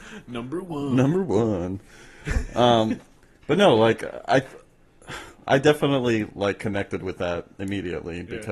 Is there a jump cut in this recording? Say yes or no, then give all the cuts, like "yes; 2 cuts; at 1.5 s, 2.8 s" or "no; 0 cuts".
no; 0 cuts